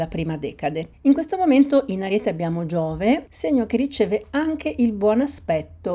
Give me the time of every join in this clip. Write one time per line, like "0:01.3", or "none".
0:00.9
0:03.3